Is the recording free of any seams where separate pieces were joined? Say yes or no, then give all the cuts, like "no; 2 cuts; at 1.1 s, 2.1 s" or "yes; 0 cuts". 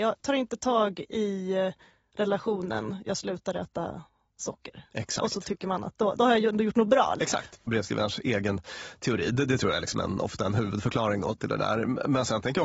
no; 1 cut; at 7.2 s